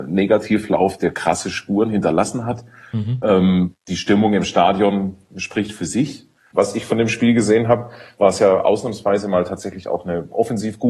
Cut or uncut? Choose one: cut